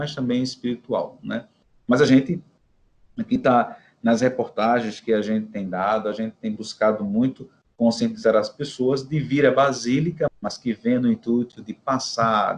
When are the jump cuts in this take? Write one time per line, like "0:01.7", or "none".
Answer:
0:10.3